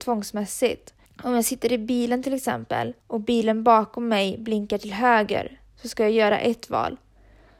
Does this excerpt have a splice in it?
yes; 2 cuts; at 1.1 s, 3.0 s

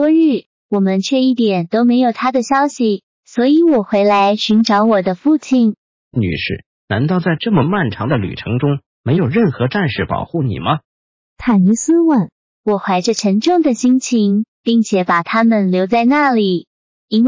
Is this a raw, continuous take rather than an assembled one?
no; 2 cuts; at 12.5 s, 14.5 s

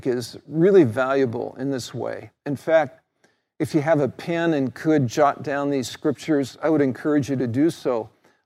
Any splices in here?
no; 0 cuts

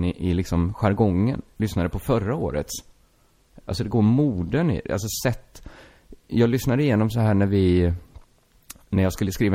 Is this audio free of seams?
no; 1 cut; at 3.6 s

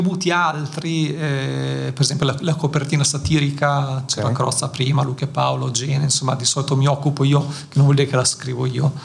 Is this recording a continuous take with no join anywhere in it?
yes; 0 cuts

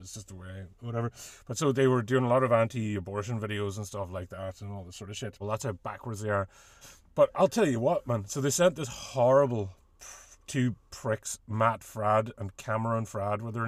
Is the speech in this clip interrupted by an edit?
yes; 2 cuts; at 5.4 s, 6.8 s

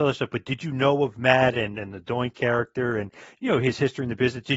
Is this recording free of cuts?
yes; 0 cuts

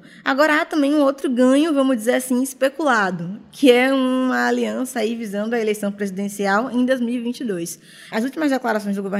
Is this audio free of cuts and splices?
no; 1 cut; at 8.1 s

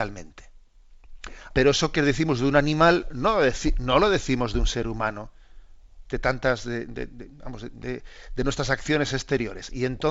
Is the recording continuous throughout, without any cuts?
no; 2 cuts; at 1.5 s, 6.0 s

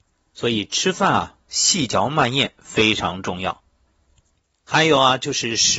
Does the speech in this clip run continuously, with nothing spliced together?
yes; 0 cuts

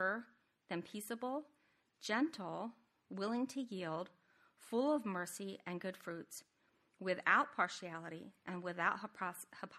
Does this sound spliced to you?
no; 0 cuts

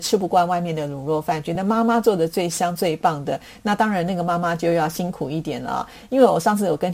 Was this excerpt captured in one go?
yes; 0 cuts

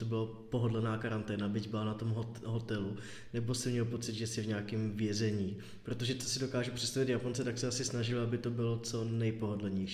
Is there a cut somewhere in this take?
no; 0 cuts

